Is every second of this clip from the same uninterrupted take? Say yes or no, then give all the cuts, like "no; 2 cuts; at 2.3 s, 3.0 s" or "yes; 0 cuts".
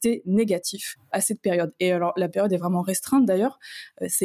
yes; 0 cuts